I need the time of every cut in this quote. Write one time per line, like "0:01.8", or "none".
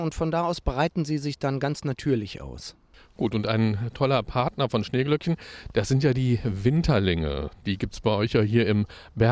none